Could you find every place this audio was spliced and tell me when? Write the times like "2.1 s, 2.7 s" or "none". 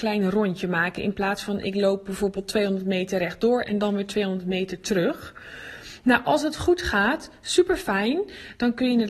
none